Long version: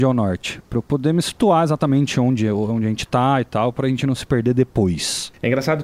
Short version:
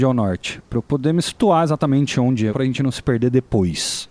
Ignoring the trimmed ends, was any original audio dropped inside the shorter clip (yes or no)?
yes